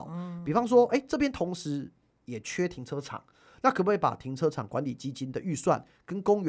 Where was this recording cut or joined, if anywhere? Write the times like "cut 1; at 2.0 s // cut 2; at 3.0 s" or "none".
none